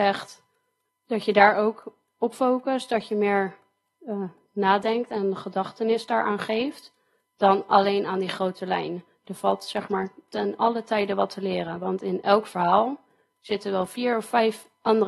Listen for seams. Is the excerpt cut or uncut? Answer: uncut